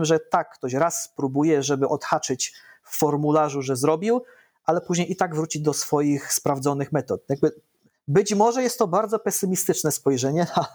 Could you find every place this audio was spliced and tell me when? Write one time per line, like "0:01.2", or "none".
none